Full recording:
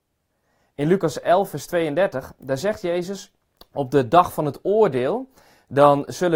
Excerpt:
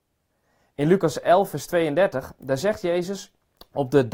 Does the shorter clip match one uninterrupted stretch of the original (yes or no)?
yes